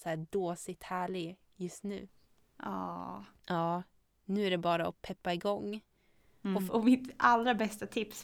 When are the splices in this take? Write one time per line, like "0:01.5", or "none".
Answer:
0:03.4
0:06.7